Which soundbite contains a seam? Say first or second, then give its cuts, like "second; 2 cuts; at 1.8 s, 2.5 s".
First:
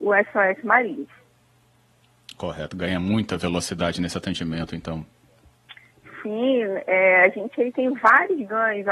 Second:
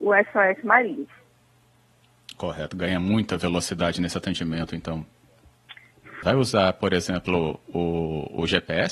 second; 1 cut; at 6.2 s